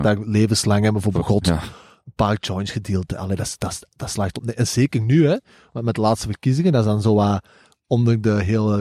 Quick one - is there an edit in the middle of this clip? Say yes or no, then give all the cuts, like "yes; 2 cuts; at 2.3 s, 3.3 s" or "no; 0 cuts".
no; 0 cuts